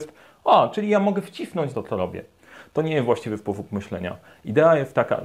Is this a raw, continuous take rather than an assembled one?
no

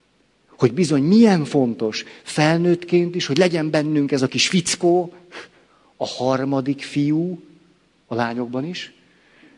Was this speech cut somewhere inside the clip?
no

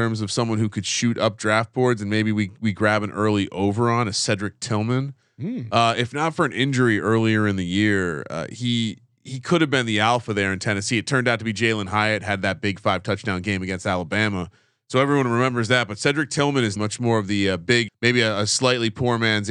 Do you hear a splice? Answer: yes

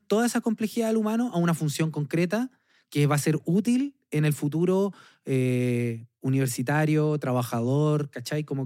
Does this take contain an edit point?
no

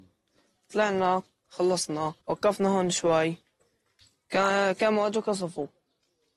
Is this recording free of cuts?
no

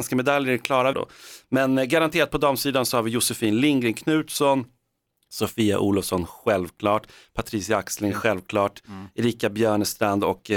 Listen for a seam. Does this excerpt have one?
yes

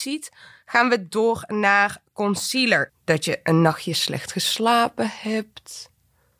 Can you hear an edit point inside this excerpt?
yes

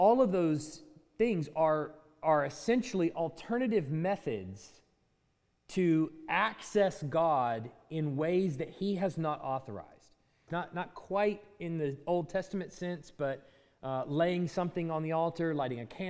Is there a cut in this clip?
yes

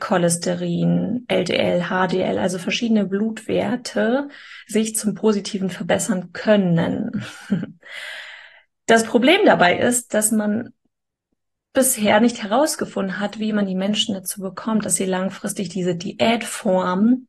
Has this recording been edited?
no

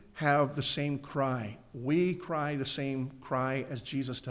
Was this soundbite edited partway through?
no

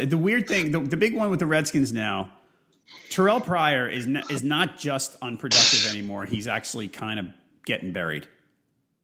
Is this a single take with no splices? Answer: yes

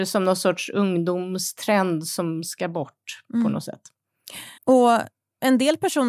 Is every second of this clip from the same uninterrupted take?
no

